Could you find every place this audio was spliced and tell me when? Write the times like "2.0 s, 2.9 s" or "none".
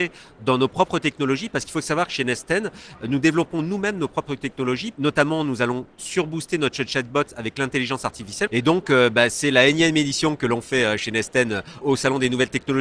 4.9 s, 8.5 s, 11.8 s